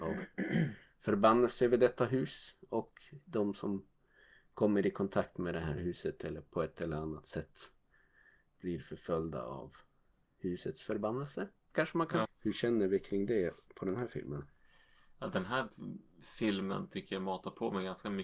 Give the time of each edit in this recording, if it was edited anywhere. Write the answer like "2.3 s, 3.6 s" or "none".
12.2 s